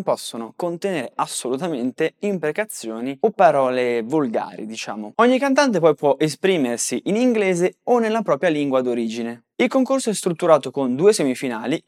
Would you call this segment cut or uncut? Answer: uncut